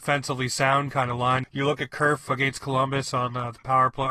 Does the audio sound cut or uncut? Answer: cut